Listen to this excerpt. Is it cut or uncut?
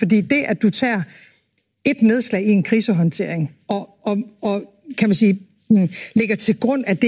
uncut